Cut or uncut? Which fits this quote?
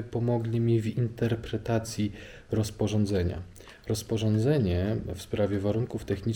uncut